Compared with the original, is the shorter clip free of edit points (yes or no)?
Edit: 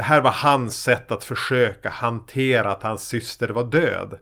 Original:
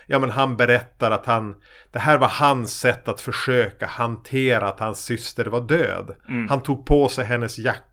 yes